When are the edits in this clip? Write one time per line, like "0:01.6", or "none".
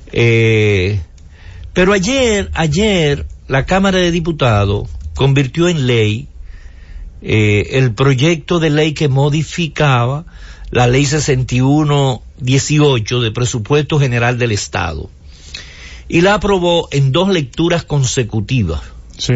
none